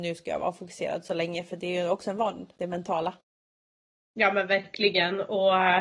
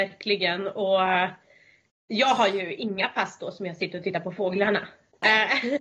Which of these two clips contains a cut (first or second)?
first